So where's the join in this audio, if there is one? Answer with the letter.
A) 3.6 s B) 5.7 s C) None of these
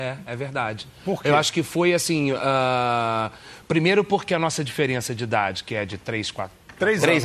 C